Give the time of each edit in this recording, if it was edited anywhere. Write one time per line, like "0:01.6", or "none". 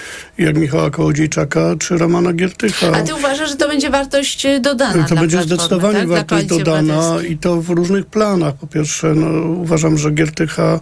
none

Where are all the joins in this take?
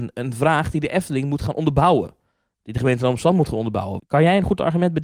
0:04.0

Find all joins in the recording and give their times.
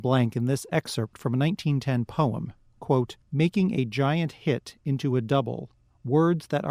0:03.2

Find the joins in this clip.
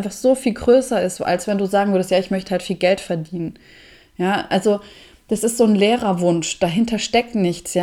none

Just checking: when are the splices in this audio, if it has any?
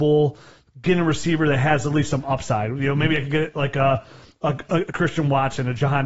none

